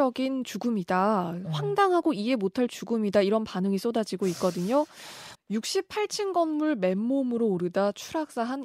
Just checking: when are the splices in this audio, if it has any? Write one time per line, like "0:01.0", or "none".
0:05.3